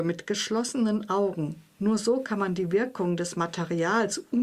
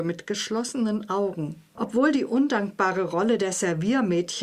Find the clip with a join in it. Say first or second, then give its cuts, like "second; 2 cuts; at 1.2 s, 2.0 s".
second; 1 cut; at 1.8 s